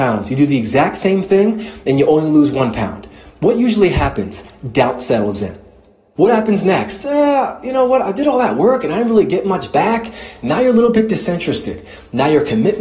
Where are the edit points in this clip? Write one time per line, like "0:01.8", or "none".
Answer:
none